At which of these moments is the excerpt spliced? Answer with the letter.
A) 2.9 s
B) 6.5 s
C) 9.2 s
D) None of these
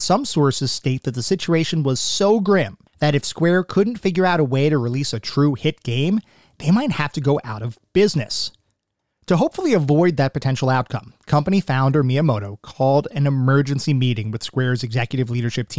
A